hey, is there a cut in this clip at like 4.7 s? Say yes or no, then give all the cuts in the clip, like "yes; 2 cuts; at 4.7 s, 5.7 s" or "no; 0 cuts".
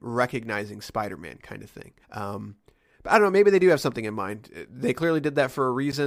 no; 1 cut; at 2.0 s